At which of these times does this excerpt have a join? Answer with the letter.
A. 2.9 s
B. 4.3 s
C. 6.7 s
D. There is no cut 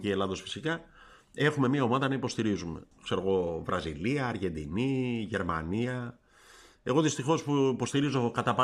A